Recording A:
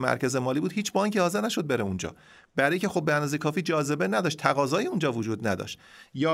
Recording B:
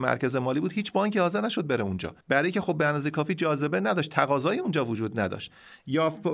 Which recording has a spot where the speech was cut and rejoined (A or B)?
B